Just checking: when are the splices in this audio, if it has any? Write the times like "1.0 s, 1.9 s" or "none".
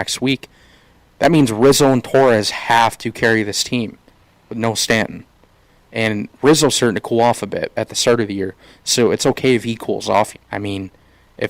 7.7 s, 10.3 s